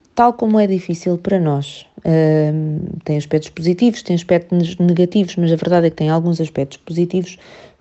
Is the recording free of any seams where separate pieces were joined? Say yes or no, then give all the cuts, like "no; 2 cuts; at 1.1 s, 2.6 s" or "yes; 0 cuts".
yes; 0 cuts